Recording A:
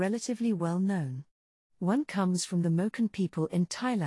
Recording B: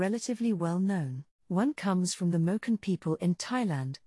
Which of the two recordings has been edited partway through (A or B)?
B